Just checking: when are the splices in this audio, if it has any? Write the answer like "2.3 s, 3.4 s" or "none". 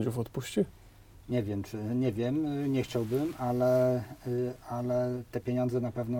none